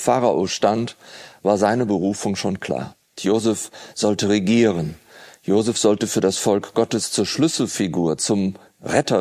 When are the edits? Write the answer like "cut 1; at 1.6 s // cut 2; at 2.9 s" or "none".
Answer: cut 1; at 3.2 s